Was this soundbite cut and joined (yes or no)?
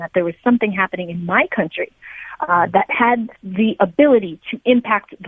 yes